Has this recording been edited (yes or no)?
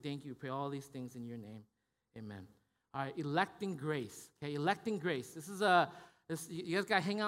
no